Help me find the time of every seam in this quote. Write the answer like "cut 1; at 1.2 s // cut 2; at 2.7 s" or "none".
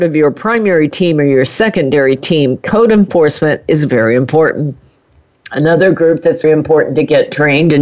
cut 1; at 6.4 s